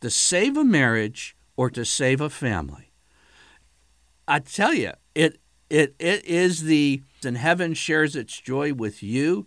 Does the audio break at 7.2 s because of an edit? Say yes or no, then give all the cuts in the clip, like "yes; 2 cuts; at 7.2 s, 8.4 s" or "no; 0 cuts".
yes; 1 cut; at 7.2 s